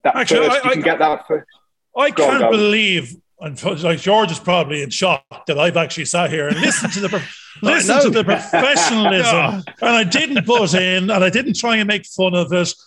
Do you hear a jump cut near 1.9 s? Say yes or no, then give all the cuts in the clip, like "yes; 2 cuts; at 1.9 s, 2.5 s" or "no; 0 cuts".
no; 0 cuts